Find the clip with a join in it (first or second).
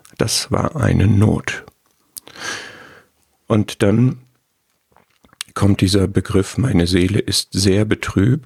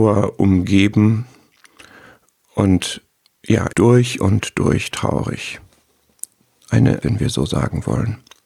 second